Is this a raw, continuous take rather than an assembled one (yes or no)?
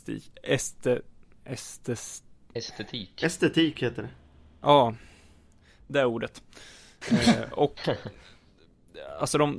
yes